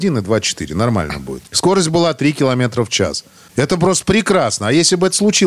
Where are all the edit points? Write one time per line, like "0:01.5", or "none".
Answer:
0:01.5